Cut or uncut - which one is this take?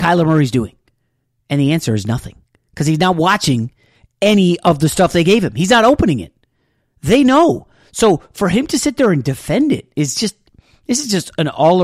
uncut